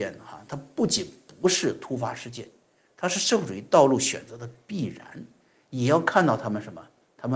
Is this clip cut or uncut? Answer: uncut